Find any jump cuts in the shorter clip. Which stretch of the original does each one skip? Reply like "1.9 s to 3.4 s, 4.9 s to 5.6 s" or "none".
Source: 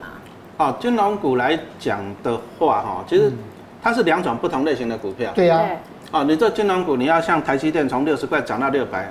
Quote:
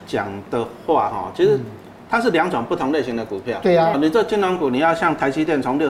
5.7 s to 6.2 s